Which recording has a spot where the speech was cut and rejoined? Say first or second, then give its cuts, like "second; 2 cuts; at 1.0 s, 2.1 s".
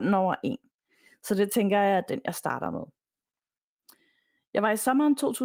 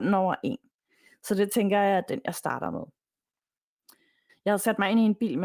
second; 1 cut; at 4.3 s